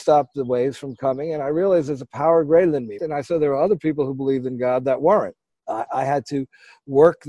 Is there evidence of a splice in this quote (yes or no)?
yes